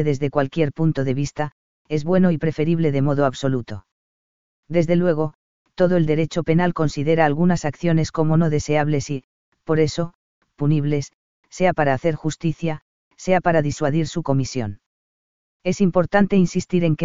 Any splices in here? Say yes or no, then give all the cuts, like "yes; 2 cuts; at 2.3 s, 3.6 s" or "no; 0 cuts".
no; 0 cuts